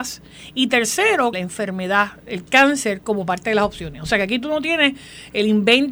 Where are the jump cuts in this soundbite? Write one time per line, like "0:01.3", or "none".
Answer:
0:01.3